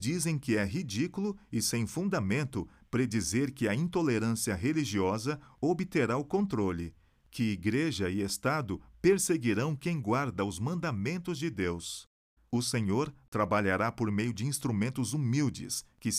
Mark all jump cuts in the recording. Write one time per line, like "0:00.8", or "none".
0:12.4